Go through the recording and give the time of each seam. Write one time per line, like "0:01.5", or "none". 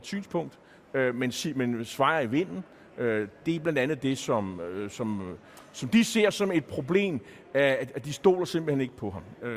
none